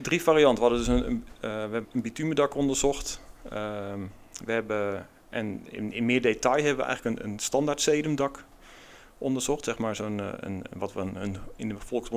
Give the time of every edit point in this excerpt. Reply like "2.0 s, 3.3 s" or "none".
1.8 s